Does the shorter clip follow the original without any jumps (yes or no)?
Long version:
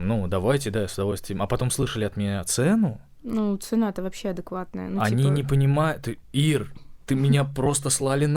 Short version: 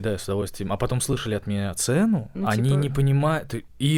no